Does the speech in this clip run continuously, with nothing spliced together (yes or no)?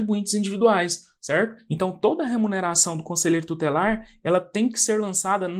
yes